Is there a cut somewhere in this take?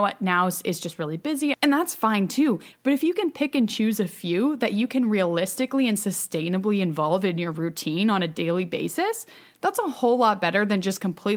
yes; 2 cuts; at 1.5 s, 2.7 s

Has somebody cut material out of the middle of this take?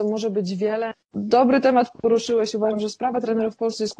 yes; 1 cut; at 0.9 s

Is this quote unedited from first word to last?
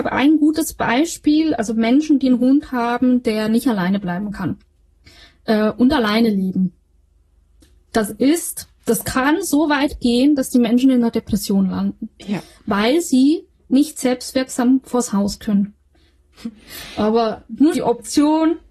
no; 3 cuts; at 8.7 s, 16.3 s, 17.7 s

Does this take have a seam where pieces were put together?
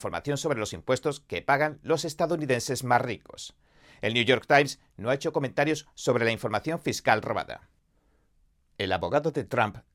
no; 0 cuts

